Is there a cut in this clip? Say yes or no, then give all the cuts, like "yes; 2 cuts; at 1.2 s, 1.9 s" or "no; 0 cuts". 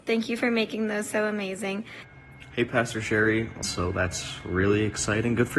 yes; 1 cut; at 3.6 s